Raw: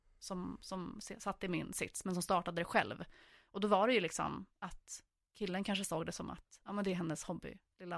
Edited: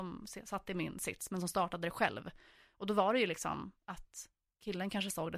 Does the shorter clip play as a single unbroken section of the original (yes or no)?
yes